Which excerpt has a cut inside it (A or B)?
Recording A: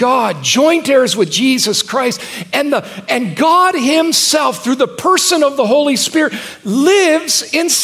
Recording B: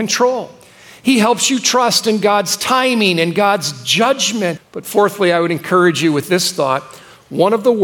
B